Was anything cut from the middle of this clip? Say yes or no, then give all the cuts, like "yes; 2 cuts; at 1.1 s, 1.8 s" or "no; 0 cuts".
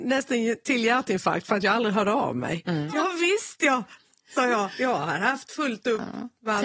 yes; 1 cut; at 2.9 s